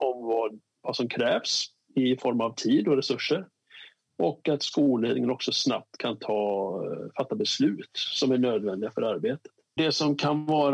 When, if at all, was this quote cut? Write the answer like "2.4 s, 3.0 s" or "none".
9.8 s